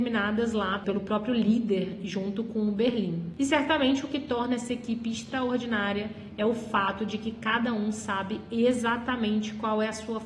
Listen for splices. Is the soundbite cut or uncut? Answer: uncut